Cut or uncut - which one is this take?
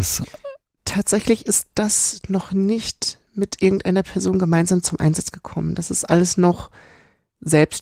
uncut